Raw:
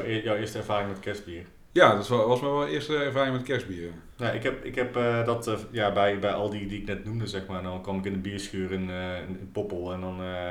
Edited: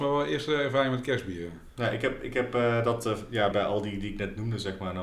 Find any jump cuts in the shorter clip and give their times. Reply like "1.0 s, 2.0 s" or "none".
3.5 s

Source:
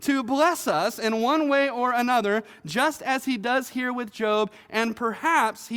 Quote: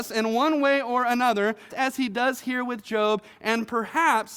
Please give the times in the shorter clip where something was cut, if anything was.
1.7 s

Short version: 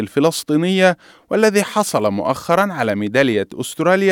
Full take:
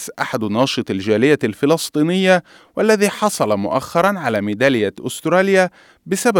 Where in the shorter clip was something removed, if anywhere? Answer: none

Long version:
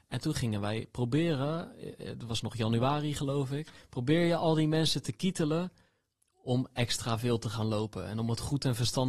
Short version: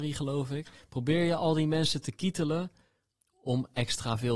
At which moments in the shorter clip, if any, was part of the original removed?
none

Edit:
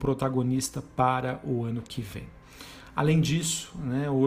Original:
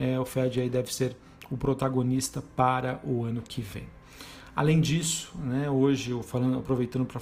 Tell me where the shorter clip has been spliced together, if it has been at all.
none

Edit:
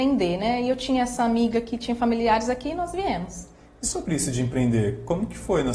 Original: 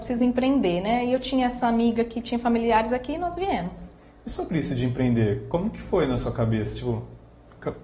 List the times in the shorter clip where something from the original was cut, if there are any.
none

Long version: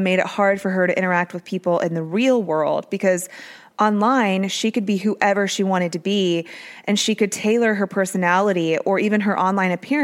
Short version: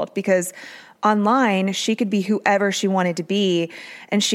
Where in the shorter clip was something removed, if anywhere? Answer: none

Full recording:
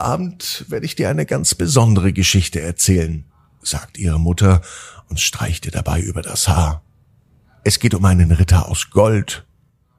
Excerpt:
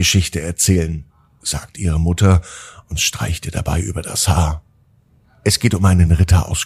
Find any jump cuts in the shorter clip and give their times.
none

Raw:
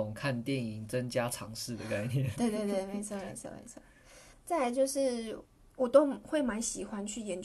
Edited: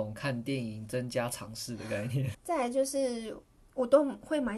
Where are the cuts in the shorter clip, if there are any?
2.3 s

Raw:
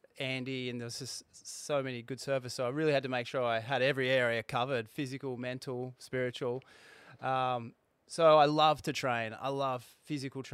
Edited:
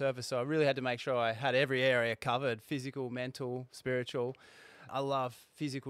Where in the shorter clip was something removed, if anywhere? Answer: 4.9 s

